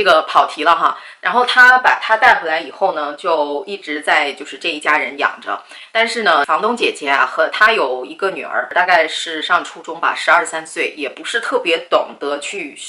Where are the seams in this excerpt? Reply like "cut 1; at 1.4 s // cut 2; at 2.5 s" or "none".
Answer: none